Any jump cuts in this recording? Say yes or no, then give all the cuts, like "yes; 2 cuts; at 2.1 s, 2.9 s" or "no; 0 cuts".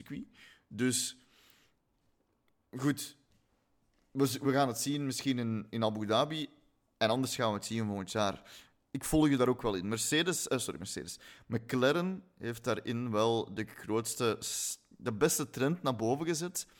no; 0 cuts